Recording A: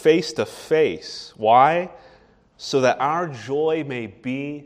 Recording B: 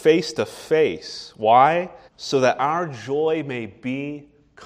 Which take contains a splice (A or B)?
B